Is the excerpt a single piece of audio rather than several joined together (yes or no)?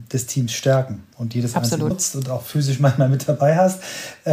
no